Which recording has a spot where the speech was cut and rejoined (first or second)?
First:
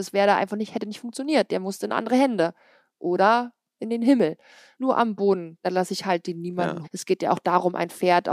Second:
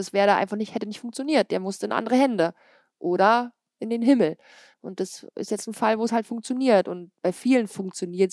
first